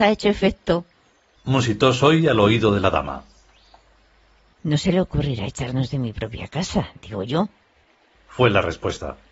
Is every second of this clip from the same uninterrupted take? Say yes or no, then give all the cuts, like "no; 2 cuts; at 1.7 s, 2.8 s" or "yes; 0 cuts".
no; 1 cut; at 1.4 s